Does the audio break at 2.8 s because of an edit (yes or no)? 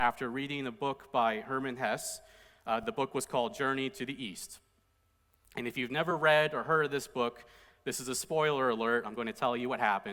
no